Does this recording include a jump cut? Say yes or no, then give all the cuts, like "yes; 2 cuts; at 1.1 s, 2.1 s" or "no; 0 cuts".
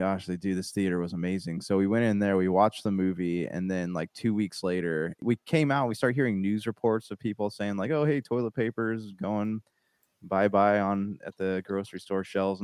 no; 0 cuts